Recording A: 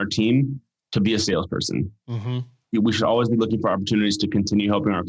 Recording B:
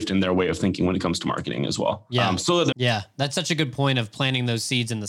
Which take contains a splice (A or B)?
B